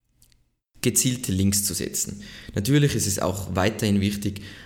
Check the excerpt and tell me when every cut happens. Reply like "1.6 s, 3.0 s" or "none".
none